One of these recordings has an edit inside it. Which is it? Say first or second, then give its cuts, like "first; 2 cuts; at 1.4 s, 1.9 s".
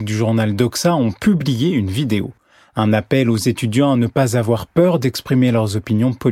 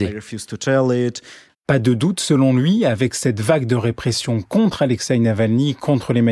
second; 1 cut; at 1.5 s